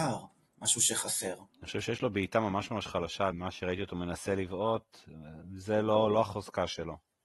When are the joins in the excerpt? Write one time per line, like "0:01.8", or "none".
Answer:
0:01.5
0:03.3